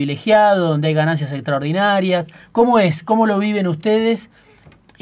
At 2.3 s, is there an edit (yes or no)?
no